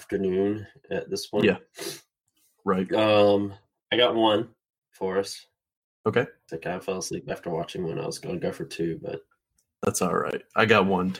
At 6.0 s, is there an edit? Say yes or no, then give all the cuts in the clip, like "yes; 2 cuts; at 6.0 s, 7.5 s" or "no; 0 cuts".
no; 0 cuts